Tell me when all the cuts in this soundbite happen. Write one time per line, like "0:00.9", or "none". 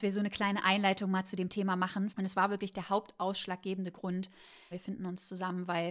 0:02.1
0:04.7